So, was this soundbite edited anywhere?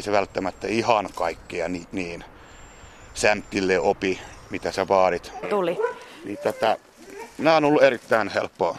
yes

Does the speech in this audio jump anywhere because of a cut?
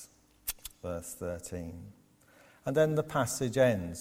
no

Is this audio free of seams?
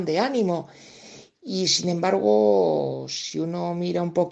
yes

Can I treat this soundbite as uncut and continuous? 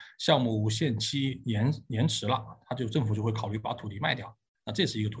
yes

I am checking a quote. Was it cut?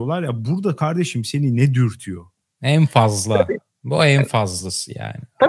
yes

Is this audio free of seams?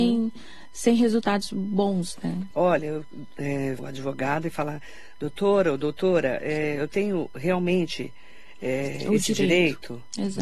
no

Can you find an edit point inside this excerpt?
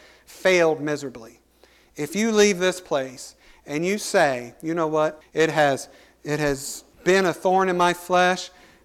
yes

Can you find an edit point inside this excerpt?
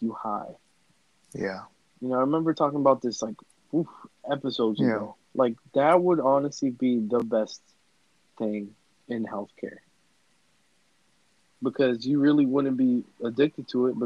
yes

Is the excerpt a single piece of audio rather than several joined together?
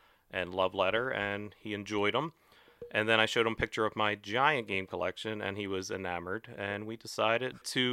yes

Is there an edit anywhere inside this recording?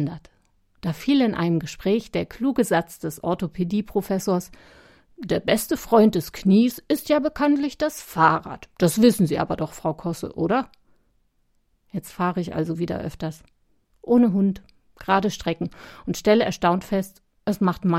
no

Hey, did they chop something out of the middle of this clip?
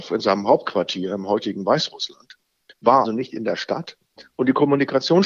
yes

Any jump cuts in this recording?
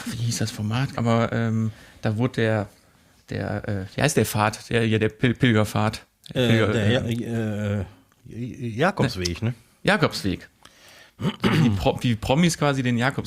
yes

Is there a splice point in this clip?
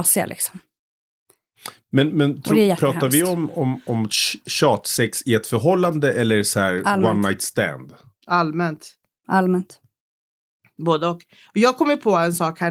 no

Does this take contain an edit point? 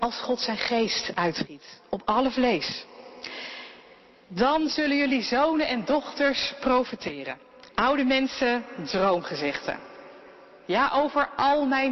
yes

